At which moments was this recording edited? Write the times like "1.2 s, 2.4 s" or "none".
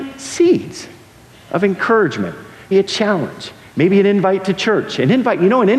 2.7 s